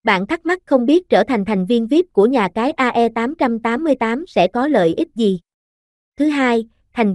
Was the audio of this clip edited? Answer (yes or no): yes